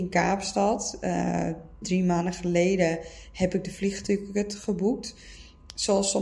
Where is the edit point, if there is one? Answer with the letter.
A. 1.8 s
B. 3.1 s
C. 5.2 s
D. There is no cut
A